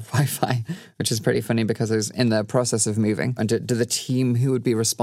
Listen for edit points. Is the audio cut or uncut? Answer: cut